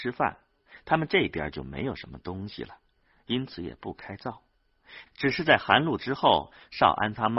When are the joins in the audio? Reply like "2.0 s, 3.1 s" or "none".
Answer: 5.1 s